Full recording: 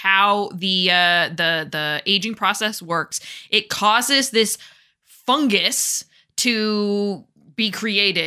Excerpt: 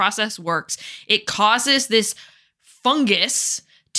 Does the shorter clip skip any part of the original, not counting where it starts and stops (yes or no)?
no